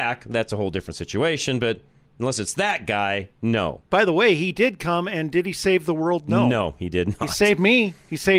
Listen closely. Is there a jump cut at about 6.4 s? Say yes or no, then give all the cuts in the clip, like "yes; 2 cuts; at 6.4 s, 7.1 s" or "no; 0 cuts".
no; 1 cut; at 3.9 s